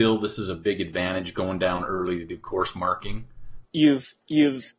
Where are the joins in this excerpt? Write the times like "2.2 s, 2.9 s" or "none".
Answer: 3.6 s